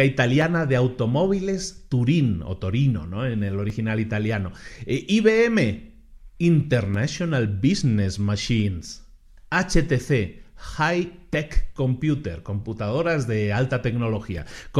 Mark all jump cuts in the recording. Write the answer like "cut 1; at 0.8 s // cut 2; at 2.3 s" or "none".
none